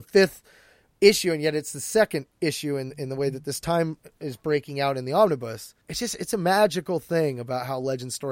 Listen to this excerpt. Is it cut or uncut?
cut